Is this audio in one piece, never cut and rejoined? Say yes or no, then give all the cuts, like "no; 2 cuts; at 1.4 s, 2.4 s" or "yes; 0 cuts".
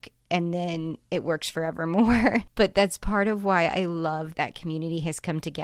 no; 1 cut; at 4.3 s